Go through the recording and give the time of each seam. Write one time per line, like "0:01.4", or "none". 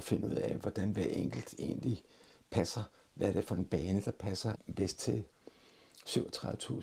none